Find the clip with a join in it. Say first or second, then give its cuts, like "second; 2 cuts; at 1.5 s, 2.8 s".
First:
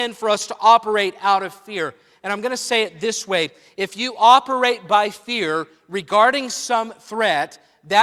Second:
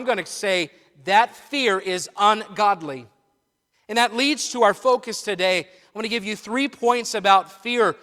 second; 1 cut; at 3.7 s